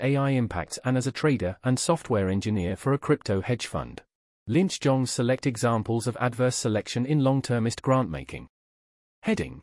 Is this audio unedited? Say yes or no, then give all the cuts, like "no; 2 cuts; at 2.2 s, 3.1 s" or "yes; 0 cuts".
no; 1 cut; at 4.4 s